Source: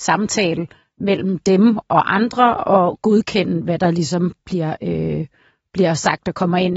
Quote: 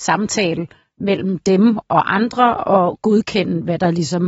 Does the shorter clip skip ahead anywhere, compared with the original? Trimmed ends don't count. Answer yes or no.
no